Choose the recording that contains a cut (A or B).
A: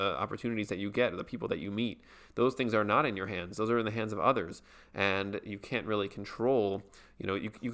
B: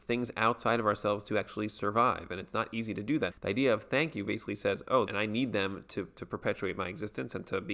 B